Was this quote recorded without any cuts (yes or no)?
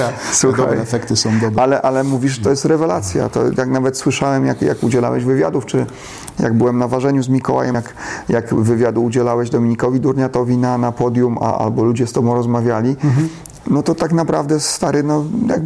no